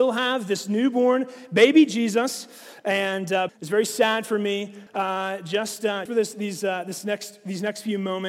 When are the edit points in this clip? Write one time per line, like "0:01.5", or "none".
0:03.5
0:04.9
0:06.1